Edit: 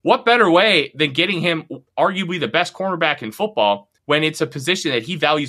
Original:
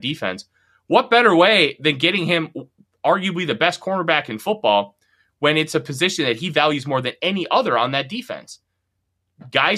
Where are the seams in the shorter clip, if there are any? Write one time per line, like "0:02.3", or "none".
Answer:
0:01.9
0:04.0